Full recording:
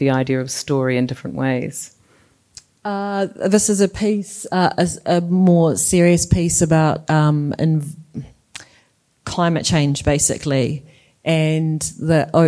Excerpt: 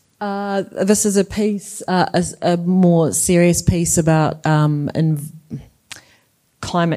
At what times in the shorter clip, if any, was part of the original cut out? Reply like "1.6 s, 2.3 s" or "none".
none

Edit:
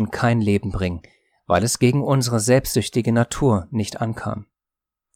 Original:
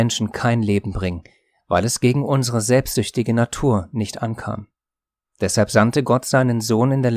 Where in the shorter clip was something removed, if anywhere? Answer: none

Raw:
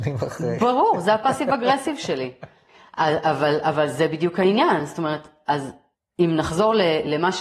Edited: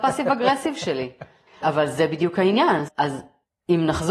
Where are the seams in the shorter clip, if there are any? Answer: 1.6 s, 2.9 s

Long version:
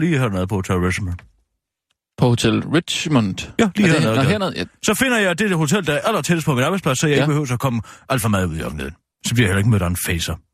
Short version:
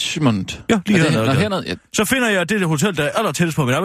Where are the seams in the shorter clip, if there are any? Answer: none

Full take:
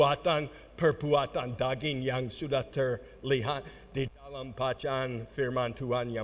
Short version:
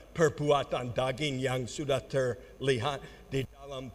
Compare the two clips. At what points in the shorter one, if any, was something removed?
none

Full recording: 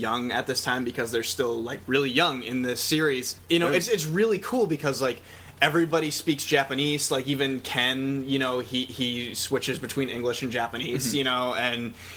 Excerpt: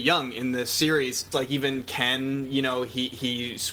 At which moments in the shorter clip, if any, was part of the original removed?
1.3 s

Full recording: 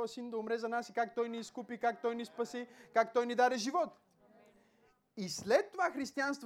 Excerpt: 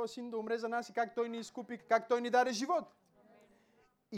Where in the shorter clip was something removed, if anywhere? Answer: 1.8 s

